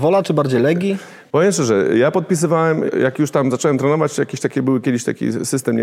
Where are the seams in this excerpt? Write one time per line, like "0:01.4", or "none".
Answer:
0:02.9